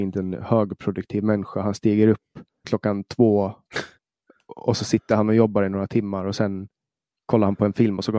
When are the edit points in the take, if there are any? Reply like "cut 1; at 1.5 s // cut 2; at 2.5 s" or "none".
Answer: cut 1; at 2.6 s